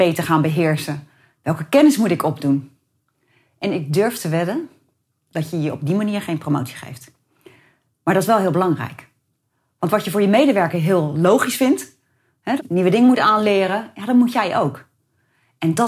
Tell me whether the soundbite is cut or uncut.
cut